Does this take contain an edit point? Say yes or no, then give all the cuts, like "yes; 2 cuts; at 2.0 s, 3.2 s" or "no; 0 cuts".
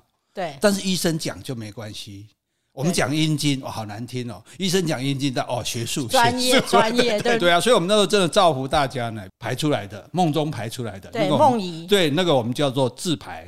yes; 2 cuts; at 7.4 s, 9.3 s